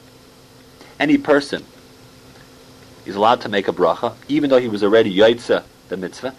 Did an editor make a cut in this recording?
yes; 1 cut; at 0.9 s

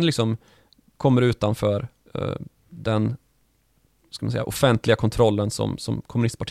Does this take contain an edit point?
no; 0 cuts

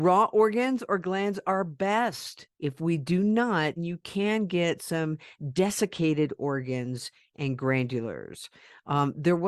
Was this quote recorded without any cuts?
no; 2 cuts; at 2.5 s, 3.8 s

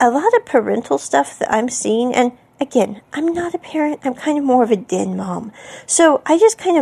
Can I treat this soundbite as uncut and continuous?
yes; 0 cuts

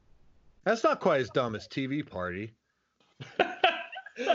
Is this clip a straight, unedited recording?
no; 1 cut; at 3.0 s

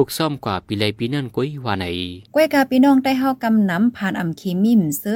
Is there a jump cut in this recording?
yes; 1 cut; at 2.3 s

